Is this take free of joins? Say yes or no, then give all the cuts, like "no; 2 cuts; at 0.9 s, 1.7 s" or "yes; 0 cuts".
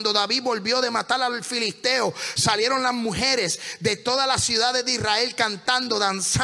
yes; 0 cuts